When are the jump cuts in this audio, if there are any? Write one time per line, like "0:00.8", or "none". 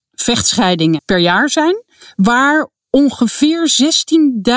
0:01.0